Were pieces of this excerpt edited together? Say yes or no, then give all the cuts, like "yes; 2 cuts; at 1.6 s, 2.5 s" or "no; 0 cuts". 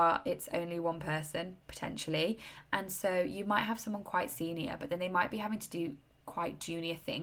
no; 0 cuts